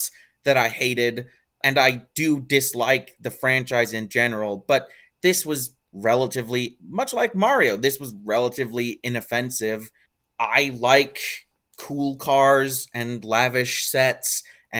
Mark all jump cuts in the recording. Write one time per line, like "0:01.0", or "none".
0:01.6